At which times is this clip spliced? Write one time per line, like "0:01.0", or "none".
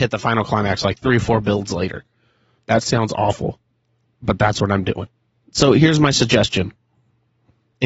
0:02.6

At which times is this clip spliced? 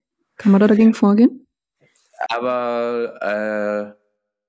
0:02.3

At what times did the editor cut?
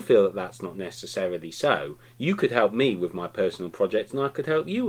none

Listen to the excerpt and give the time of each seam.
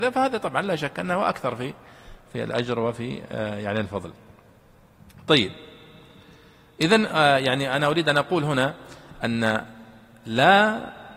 none

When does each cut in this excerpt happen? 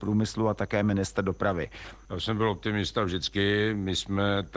0:02.0

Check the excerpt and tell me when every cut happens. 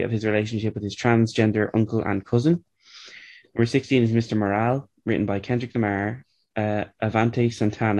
none

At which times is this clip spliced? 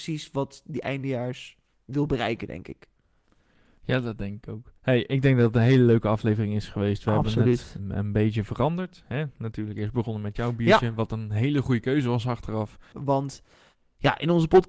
0:04.8
0:12.9

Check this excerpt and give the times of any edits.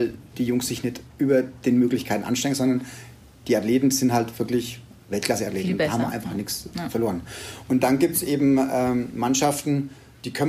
0:01.1

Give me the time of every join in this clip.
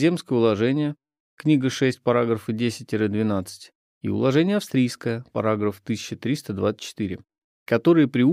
none

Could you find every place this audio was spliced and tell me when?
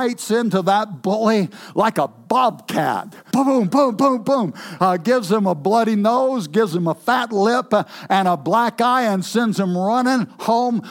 0:03.3

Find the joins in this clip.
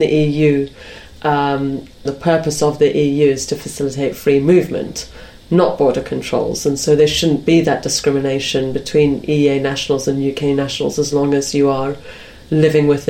0:02.1

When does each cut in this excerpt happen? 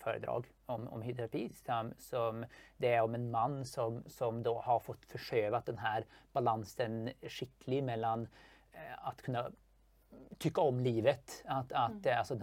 none

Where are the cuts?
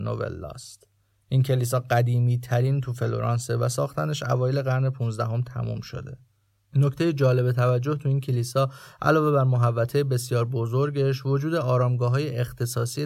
none

